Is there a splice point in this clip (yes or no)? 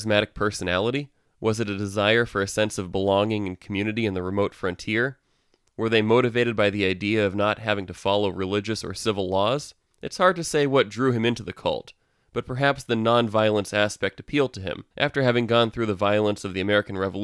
yes